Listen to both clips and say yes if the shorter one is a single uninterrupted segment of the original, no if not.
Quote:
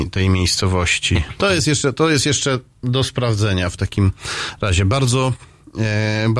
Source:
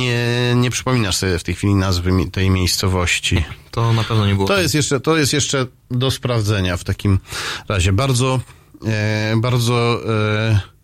no